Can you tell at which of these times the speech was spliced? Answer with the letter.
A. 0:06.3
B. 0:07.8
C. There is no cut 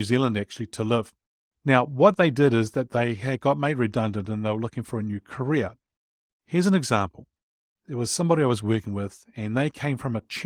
A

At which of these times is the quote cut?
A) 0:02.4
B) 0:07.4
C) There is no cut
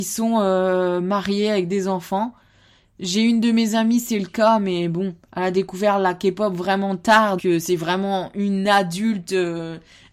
B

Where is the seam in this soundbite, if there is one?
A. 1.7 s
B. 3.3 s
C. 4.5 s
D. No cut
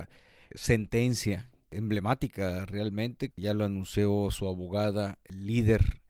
B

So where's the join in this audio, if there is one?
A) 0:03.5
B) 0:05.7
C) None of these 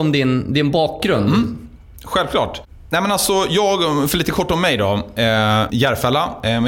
B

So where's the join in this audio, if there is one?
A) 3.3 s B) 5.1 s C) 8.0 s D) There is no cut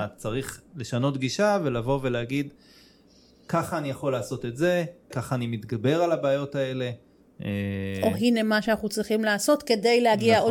B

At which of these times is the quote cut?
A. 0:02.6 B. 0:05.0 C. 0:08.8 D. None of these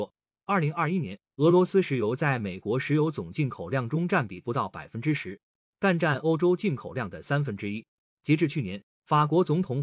C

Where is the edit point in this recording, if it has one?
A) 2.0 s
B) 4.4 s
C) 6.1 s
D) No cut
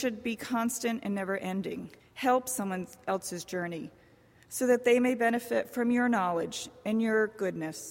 A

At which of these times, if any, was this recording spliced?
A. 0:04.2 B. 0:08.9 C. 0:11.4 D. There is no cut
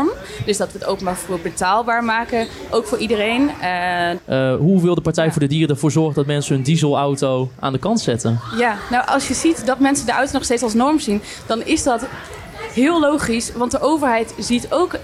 A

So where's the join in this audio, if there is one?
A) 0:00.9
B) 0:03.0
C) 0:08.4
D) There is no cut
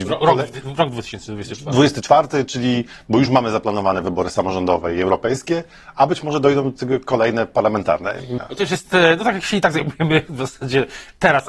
C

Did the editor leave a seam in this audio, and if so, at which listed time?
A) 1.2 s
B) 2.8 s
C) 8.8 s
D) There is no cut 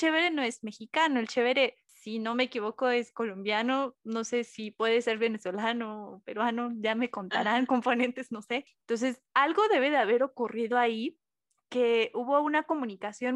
C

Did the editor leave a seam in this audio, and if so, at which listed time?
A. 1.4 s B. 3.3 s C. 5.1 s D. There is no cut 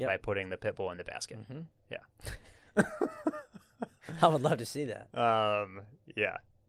D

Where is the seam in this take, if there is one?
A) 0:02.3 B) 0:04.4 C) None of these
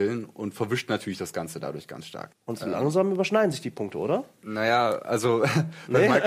A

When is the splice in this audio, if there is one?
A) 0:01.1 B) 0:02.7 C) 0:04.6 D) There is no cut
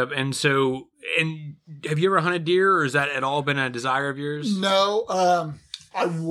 D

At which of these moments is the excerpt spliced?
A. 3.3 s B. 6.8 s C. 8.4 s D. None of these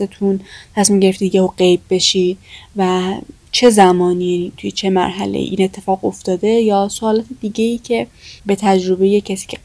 C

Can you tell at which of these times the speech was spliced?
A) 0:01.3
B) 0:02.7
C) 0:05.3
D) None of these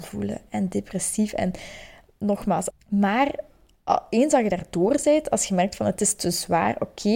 B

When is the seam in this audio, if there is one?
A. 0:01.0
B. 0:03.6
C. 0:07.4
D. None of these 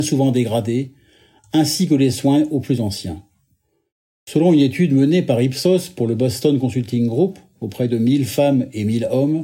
D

